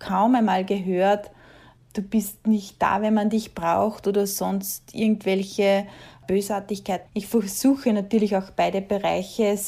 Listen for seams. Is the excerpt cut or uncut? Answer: cut